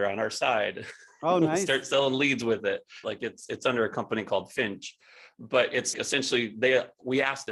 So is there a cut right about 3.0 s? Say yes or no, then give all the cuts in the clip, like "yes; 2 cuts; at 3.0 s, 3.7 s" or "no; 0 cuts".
yes; 2 cuts; at 3.0 s, 5.9 s